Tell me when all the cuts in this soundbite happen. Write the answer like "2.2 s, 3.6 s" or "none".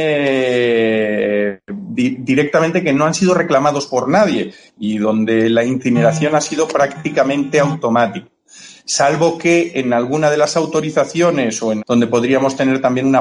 8.8 s, 11.8 s